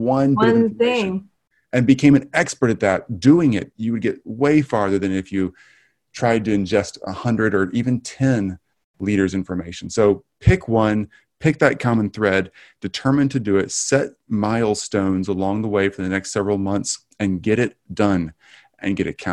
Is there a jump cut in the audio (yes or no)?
yes